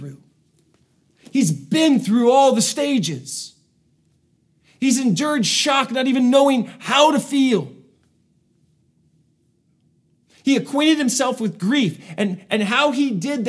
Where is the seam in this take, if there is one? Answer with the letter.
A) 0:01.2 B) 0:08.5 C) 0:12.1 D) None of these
D